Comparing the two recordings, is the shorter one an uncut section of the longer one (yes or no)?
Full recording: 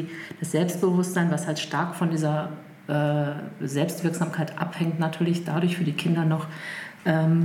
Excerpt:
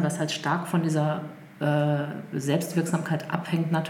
yes